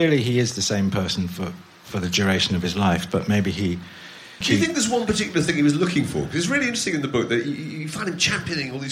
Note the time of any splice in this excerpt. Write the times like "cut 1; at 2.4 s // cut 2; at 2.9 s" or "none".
cut 1; at 4.4 s

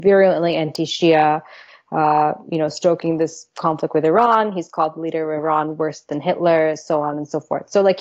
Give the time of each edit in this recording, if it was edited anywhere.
none

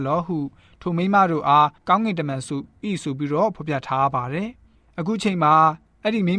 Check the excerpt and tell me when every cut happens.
none

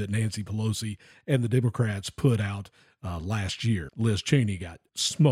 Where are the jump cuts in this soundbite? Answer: cut 1; at 3.9 s

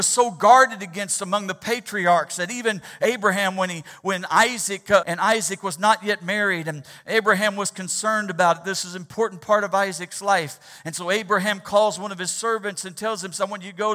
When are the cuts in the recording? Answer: cut 1; at 5.0 s

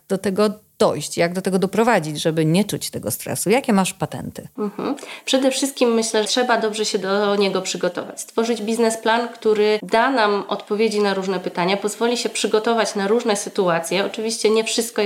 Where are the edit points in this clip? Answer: cut 1; at 6.2 s

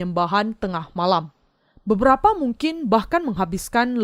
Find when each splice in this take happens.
none

